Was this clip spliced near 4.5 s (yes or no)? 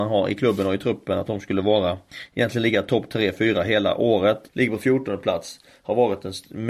yes